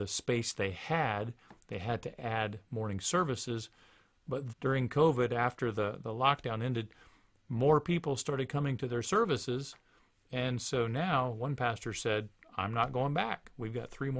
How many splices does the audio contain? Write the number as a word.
one